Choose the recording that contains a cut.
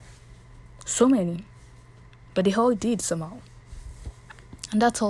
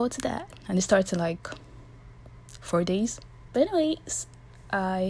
second; 1 cut; at 3.5 s

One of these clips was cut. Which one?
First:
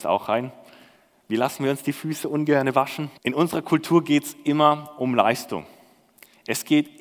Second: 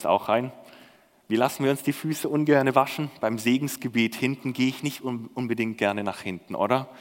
first; 1 cut; at 3.2 s

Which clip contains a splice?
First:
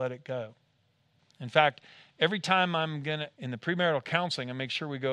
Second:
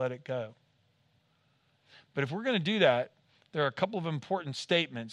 first; 2 cuts; at 1.2 s, 3.3 s

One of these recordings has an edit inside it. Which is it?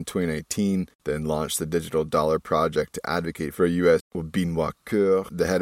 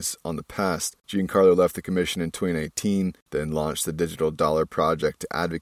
first; 1 cut; at 4.0 s

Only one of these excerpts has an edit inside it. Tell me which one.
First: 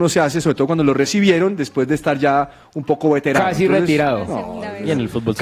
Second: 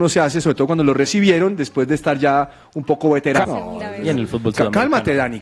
second; 1 cut; at 3.4 s

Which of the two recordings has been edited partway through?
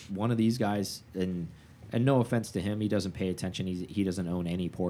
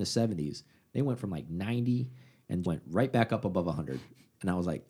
second; 1 cut; at 2.6 s

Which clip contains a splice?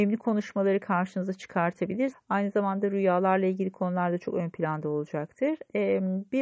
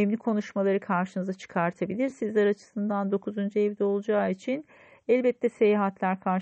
first; 1 cut; at 2.1 s

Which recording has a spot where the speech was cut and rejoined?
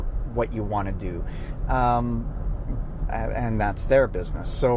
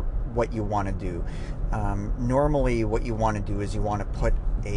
first; 1 cut; at 1.7 s

